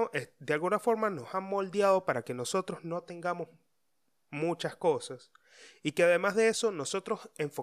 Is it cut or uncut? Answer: uncut